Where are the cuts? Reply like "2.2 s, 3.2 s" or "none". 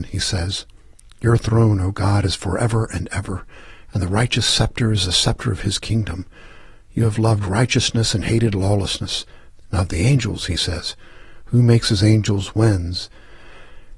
9.5 s